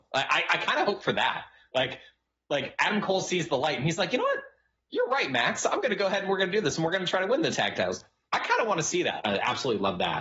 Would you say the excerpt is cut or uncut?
cut